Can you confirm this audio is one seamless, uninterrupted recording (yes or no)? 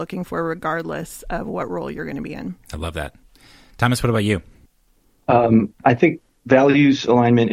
yes